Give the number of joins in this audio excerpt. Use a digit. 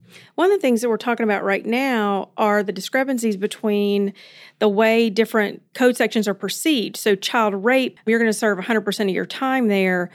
1